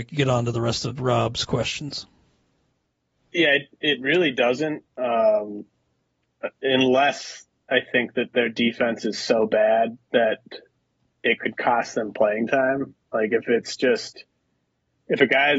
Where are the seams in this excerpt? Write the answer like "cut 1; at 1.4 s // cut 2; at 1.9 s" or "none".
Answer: none